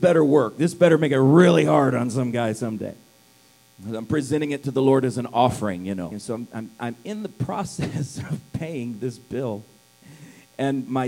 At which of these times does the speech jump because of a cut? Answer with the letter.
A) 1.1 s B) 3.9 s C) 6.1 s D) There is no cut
C